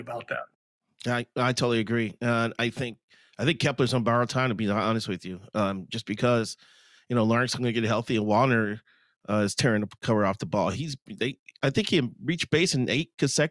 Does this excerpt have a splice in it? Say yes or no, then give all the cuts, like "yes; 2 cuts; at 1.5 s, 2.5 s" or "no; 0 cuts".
no; 0 cuts